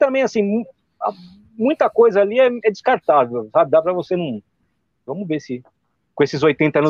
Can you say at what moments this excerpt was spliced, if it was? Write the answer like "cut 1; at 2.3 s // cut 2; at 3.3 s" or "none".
cut 1; at 5.1 s